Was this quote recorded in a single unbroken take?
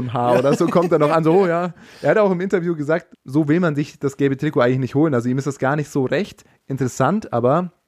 no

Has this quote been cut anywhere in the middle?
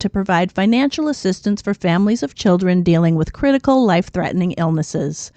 no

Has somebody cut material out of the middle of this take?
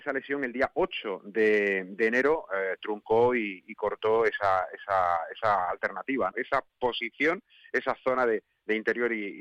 yes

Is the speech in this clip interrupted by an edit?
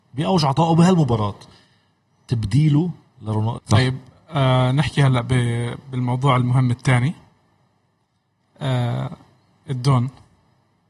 yes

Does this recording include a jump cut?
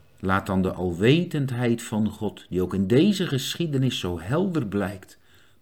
no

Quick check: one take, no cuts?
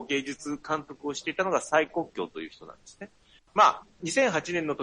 no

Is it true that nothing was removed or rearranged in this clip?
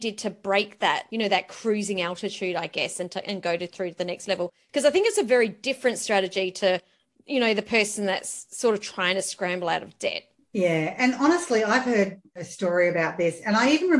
yes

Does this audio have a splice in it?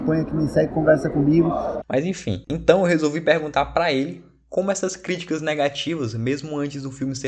yes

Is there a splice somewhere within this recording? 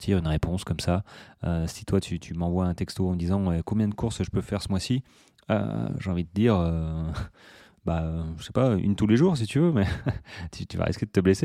no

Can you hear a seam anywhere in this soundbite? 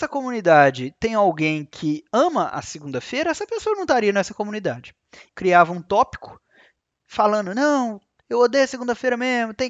yes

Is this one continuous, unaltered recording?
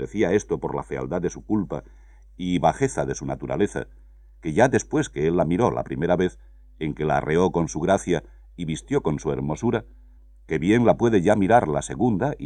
yes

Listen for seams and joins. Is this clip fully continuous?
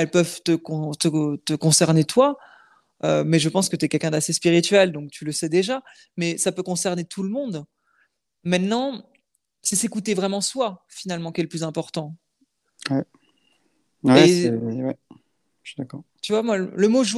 yes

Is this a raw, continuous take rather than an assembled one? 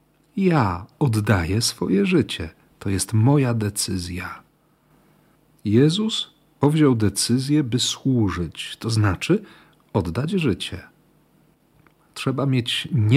yes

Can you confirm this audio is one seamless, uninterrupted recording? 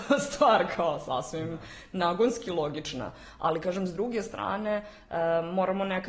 yes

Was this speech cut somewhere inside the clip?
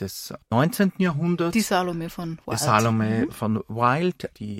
no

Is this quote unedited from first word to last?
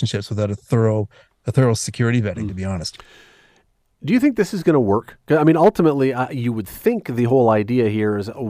yes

